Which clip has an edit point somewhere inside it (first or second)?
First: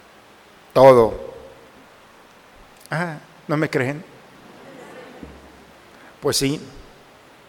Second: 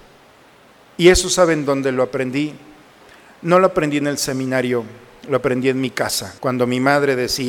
second